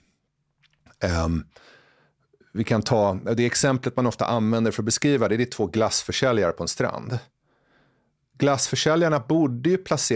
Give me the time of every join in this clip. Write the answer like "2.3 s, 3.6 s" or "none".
none

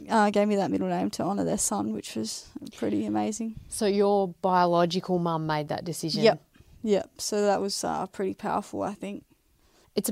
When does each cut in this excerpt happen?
none

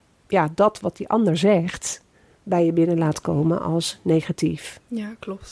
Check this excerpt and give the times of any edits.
none

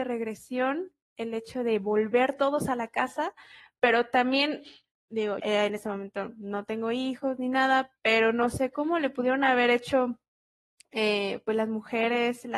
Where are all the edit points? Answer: 5.4 s

